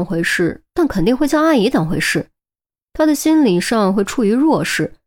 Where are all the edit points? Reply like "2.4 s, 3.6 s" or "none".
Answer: none